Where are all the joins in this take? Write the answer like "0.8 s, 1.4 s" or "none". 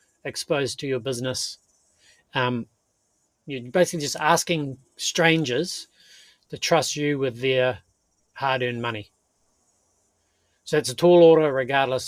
3.2 s